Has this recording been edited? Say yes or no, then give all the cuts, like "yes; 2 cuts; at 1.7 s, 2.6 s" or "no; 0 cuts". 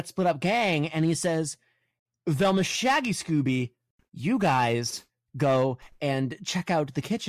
no; 0 cuts